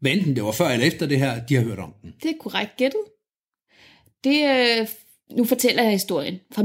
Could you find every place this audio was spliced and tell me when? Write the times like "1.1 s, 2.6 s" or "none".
none